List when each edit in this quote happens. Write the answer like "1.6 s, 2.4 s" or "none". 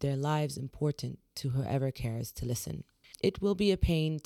3.1 s